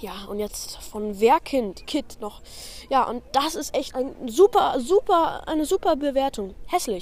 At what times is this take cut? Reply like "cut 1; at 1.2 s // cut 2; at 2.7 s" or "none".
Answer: cut 1; at 1.8 s // cut 2; at 3.9 s